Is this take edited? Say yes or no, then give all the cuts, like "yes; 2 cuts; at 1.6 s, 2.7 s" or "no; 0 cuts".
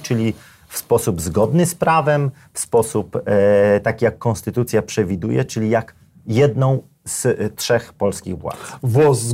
no; 0 cuts